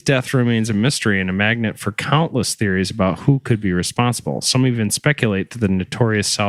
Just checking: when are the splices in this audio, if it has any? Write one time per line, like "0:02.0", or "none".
none